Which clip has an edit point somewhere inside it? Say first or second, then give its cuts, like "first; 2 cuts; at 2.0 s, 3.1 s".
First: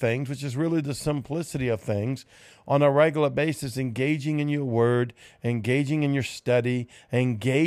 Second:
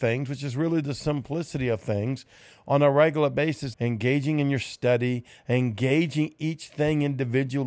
second; 1 cut; at 3.7 s